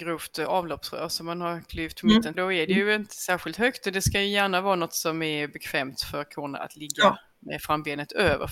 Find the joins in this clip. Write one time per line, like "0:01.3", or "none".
0:02.3